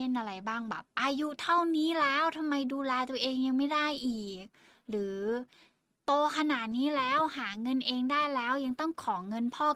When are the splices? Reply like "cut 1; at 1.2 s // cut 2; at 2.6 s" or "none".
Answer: cut 1; at 0.9 s